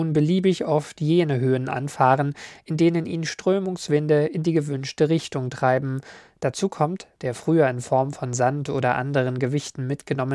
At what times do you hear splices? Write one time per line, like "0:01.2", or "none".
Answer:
0:07.2